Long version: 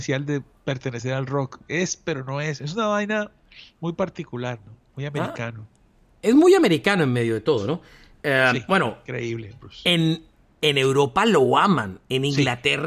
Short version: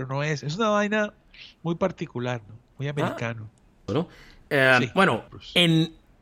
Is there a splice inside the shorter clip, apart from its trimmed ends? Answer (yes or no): yes